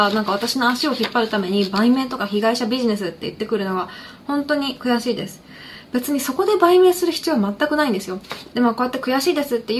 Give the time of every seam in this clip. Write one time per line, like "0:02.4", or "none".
0:05.8
0:08.5

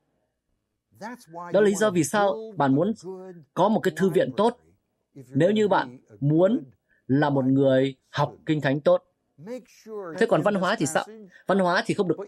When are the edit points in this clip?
0:10.1

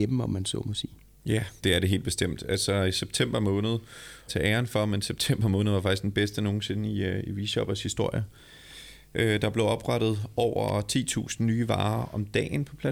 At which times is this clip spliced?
0:01.6
0:04.3

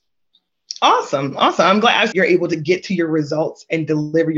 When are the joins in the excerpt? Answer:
0:02.1

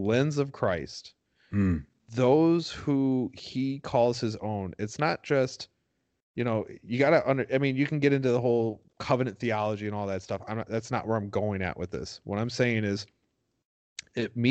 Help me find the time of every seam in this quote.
none

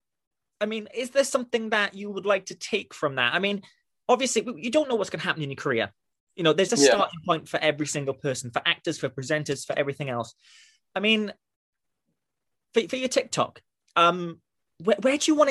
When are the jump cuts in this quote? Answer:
0:06.7

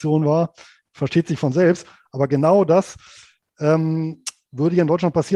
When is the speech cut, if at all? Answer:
none

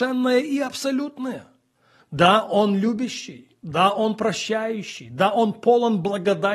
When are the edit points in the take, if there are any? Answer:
0:02.0

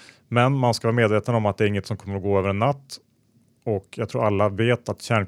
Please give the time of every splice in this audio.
none

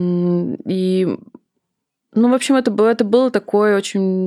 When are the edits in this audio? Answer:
none

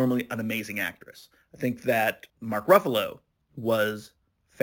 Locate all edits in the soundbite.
0:02.3

